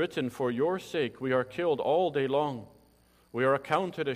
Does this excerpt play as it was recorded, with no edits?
yes; 0 cuts

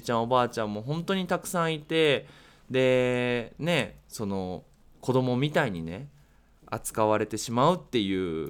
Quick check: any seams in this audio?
no; 0 cuts

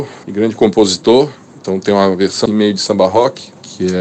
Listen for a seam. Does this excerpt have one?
yes; 1 cut; at 2.5 s

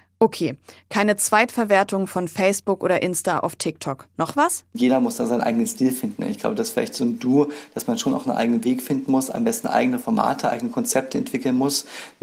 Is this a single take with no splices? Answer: yes; 0 cuts

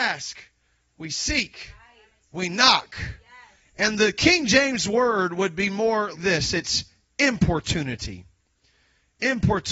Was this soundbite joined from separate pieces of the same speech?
yes; 2 cuts; at 3.6 s, 6.1 s

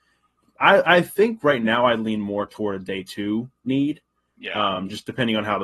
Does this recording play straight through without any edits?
yes; 0 cuts

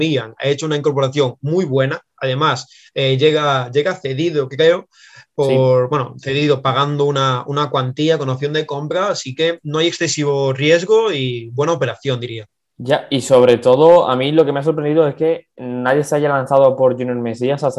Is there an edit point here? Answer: no; 0 cuts

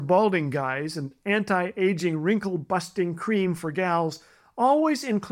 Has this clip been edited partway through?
no; 0 cuts

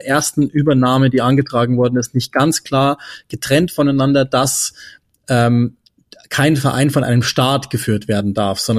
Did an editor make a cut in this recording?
no; 0 cuts

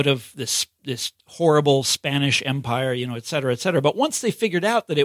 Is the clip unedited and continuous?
yes; 0 cuts

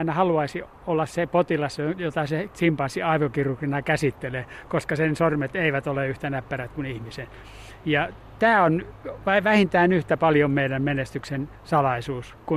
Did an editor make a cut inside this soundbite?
no; 0 cuts

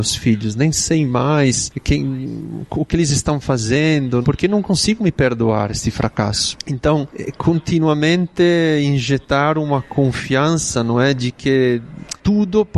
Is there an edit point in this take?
yes; 1 cut; at 4.2 s

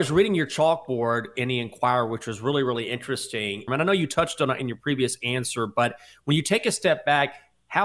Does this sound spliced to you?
yes; 1 cut; at 3.7 s

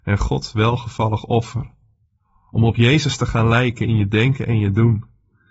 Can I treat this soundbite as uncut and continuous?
yes; 0 cuts

